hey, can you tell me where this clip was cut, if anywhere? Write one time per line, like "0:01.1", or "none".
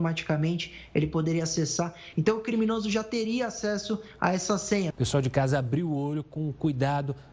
0:02.1
0:04.9